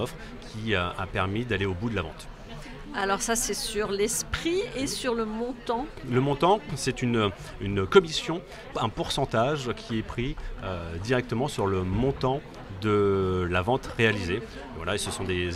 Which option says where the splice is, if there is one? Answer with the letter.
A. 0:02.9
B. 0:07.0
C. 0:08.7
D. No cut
C